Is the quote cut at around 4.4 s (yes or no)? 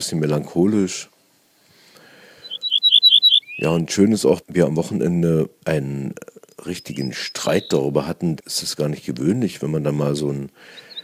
yes